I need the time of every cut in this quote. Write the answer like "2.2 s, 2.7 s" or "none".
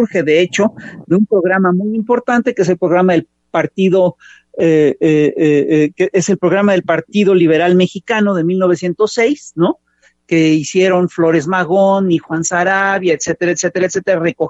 none